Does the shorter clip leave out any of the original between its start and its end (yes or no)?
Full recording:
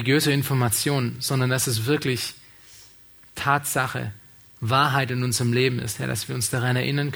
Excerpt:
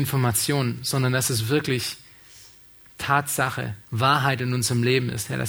yes